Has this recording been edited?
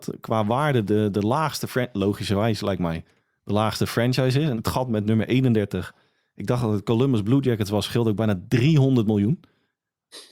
yes; 1 cut; at 4.5 s

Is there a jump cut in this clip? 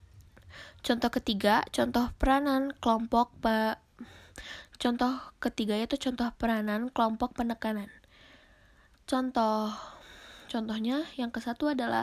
no; 0 cuts

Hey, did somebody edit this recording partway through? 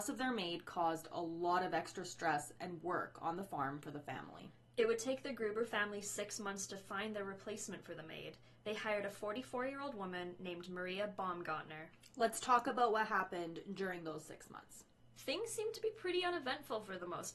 no; 0 cuts

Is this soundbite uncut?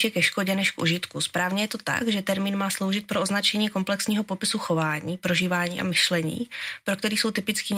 yes; 0 cuts

